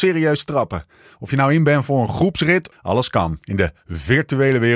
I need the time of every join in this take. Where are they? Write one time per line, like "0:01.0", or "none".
0:02.7